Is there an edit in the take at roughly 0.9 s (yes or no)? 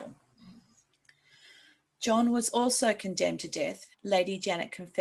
no